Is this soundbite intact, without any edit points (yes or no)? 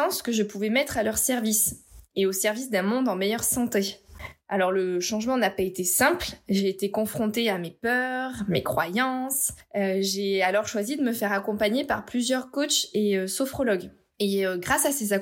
yes